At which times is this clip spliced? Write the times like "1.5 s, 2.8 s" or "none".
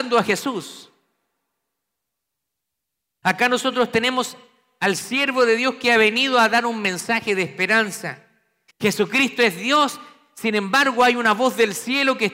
3.2 s, 8.7 s